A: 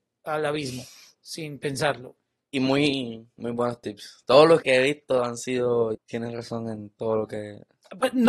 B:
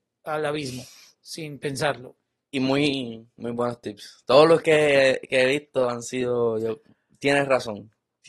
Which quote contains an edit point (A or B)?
A